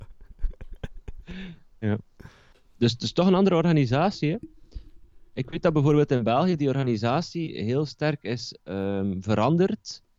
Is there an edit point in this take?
no; 0 cuts

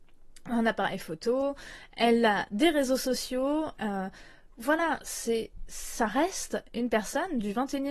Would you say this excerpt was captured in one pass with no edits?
yes; 0 cuts

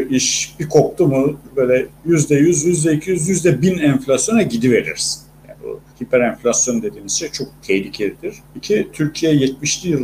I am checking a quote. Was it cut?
yes; 3 cuts; at 3.3 s, 5.9 s, 8.4 s

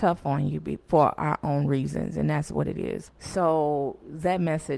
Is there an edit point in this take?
yes; 1 cut; at 3.1 s

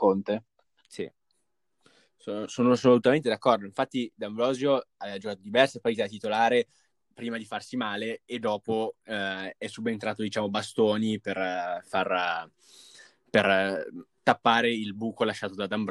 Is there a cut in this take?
no; 0 cuts

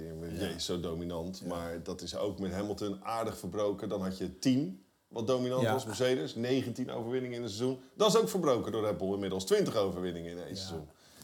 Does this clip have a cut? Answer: no; 0 cuts

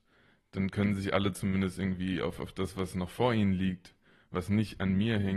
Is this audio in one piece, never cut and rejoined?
yes; 0 cuts

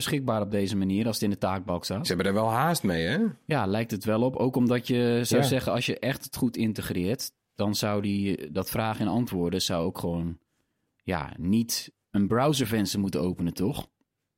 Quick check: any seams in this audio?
no; 0 cuts

